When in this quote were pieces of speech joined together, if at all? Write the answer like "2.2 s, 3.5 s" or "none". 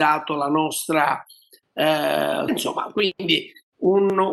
2.5 s